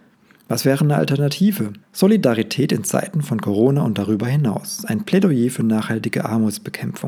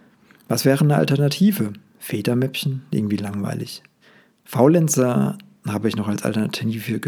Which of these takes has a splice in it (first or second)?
first